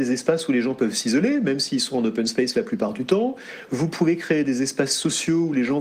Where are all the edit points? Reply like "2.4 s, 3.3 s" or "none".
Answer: none